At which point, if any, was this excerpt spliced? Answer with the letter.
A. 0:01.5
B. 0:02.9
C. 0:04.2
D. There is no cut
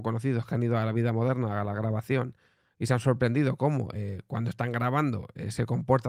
D